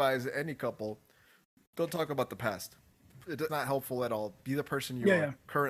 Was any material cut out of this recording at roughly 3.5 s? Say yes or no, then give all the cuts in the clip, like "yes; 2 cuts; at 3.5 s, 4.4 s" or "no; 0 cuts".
yes; 1 cut; at 3.5 s